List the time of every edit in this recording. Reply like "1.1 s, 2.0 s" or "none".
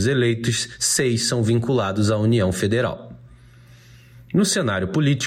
none